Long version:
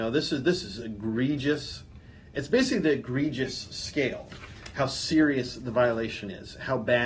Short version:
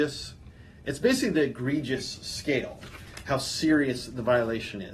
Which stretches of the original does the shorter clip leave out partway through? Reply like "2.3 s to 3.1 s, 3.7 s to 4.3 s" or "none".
none